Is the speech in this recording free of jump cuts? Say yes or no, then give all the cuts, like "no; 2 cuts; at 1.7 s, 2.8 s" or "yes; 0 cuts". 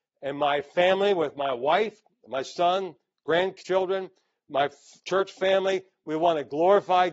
yes; 0 cuts